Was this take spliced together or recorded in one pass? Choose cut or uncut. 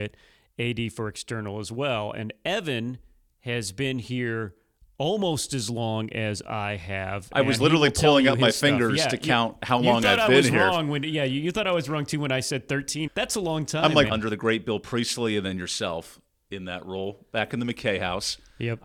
cut